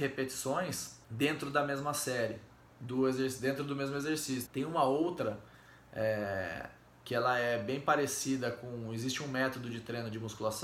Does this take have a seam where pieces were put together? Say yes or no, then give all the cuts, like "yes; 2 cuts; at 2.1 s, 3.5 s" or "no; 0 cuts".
yes; 2 cuts; at 1.0 s, 4.4 s